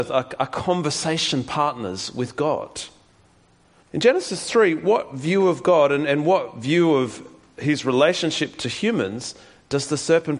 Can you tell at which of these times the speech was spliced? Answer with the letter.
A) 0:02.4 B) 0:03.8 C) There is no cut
B